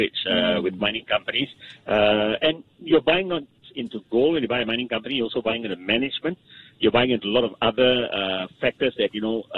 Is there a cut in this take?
no; 0 cuts

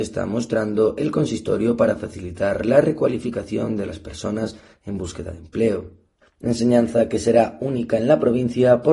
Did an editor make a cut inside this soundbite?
yes; 1 cut; at 6.2 s

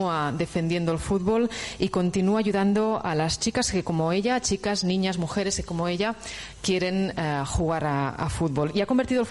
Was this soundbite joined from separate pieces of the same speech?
no; 0 cuts

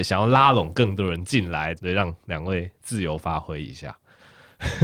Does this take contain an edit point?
yes; 1 cut; at 1.8 s

